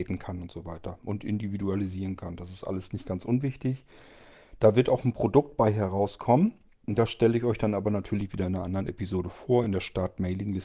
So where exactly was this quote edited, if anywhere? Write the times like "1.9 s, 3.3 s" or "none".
none